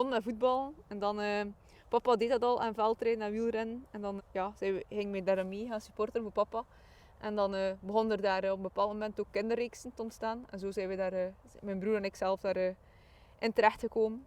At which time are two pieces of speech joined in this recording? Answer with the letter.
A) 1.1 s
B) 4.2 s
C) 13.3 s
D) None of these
B